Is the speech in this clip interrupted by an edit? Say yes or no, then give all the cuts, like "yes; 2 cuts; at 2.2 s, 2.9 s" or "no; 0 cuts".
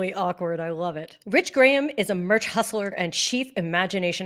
yes; 2 cuts; at 1.2 s, 2.9 s